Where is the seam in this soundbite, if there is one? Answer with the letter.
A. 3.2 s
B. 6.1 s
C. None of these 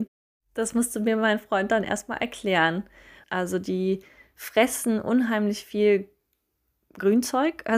A